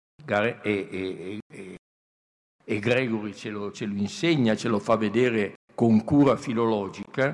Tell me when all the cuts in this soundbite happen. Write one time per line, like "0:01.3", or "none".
0:03.7
0:05.6